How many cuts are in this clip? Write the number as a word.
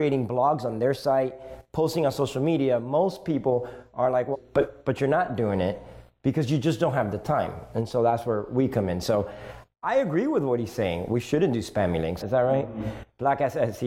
two